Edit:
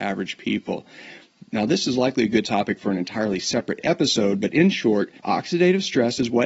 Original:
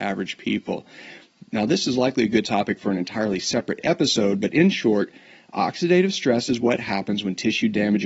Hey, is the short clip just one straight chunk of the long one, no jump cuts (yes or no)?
no